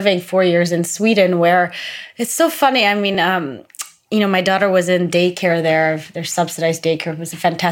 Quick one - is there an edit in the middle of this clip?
no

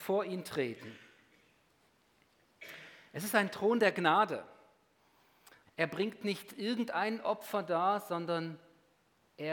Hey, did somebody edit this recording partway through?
yes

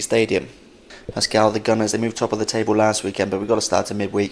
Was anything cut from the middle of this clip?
no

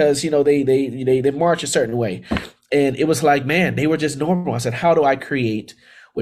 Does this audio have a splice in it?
no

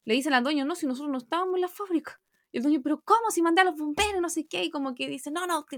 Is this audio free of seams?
yes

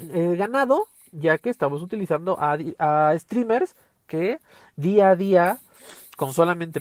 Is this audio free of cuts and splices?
yes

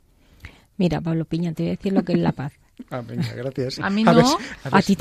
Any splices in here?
yes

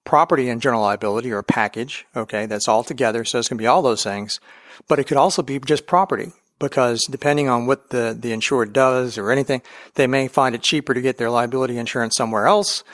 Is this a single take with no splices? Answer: yes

